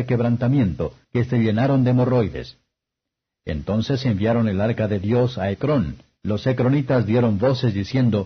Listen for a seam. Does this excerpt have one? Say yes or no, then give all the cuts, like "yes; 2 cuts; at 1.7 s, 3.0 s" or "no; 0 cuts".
yes; 2 cuts; at 1.0 s, 6.2 s